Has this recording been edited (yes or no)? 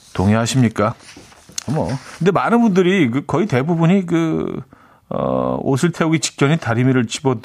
yes